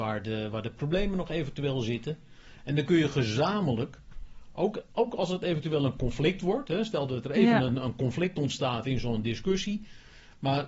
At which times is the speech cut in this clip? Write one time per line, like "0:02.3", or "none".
none